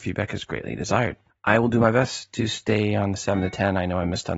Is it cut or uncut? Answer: cut